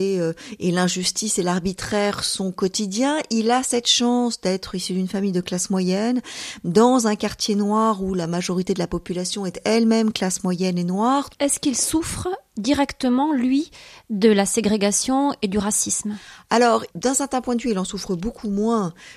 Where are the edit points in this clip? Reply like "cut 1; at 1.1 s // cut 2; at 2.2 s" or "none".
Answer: cut 1; at 11.3 s